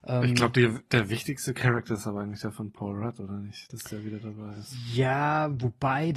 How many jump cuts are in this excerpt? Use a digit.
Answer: 0